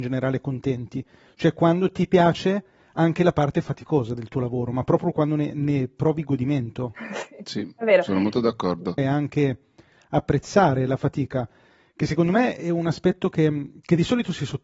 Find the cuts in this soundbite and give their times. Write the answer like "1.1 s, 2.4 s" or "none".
9.0 s